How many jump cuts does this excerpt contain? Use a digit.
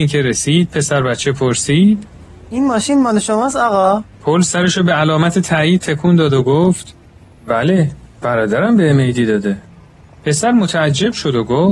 1